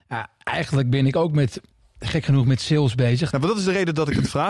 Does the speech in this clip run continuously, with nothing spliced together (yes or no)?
no